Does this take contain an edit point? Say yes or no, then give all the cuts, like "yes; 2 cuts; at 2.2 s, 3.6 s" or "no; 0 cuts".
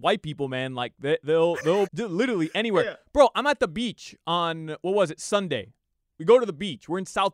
yes; 1 cut; at 1.9 s